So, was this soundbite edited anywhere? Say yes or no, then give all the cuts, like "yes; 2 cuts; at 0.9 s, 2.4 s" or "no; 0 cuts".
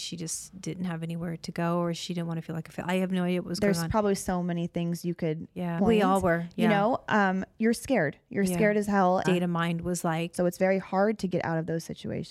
yes; 3 cuts; at 5.8 s, 9.2 s, 10.3 s